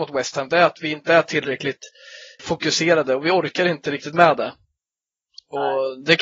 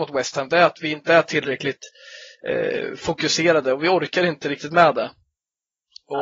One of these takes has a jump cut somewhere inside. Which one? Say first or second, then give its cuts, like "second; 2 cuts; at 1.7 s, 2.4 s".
first; 1 cut; at 2.4 s